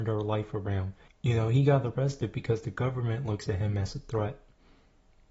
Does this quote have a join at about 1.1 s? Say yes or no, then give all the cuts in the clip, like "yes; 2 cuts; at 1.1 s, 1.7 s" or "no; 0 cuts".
yes; 1 cut; at 1.1 s